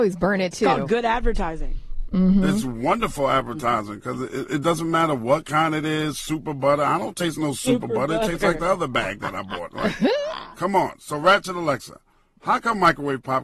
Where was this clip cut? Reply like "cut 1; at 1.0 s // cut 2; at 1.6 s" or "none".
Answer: none